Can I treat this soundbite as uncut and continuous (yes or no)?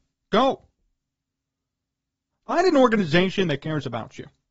yes